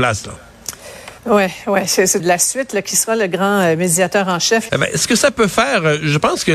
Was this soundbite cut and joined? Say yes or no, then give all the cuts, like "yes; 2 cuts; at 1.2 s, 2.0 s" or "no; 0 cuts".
yes; 3 cuts; at 1.2 s, 2.2 s, 4.7 s